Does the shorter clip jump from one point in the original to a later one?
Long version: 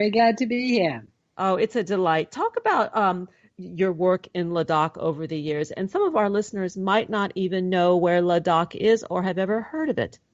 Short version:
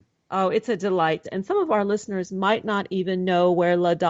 yes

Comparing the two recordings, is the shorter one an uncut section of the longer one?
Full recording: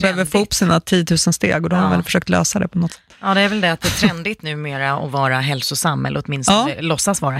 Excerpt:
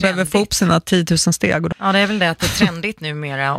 no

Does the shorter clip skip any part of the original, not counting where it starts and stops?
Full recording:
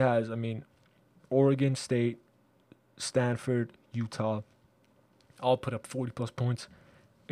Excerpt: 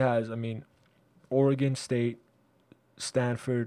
no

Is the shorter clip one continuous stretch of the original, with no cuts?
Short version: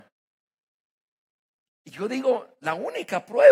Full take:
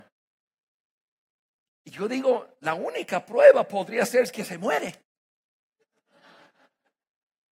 yes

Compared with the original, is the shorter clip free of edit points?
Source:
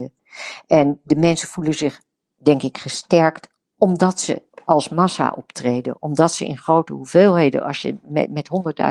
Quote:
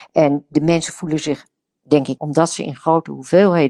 no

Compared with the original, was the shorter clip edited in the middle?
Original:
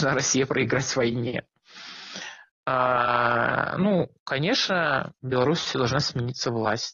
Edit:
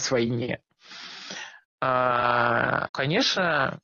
yes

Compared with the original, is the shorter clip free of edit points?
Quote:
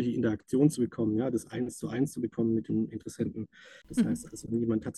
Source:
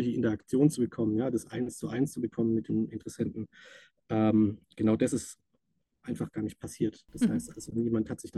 no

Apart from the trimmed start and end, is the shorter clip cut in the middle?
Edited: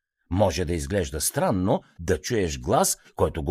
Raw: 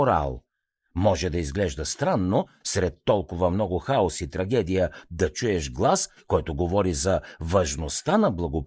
yes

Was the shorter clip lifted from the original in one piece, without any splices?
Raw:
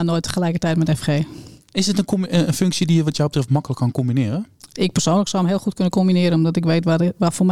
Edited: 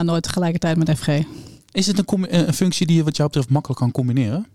yes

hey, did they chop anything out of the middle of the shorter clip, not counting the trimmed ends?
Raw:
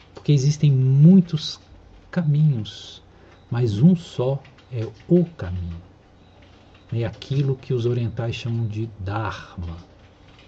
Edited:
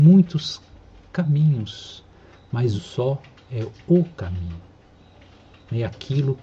yes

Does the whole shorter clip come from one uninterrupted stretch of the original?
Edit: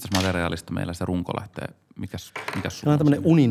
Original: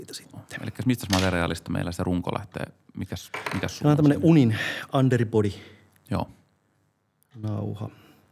yes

